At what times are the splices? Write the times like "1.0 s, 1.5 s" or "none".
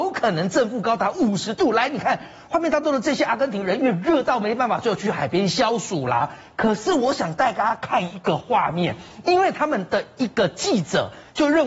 none